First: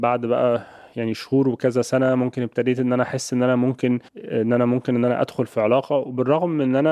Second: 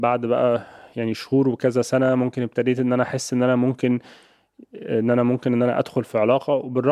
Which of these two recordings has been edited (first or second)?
first